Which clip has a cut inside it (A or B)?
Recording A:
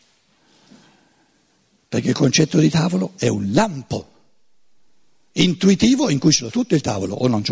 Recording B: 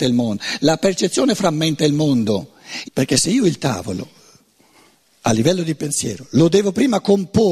B